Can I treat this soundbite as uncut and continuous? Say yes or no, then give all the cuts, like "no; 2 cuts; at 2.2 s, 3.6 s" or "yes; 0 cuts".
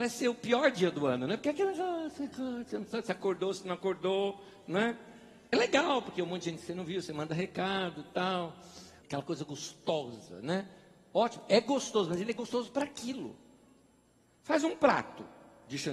no; 2 cuts; at 5.5 s, 9.0 s